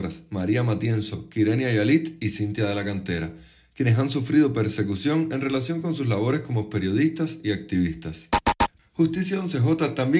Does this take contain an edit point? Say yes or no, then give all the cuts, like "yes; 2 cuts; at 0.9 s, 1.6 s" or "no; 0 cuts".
yes; 1 cut; at 8.8 s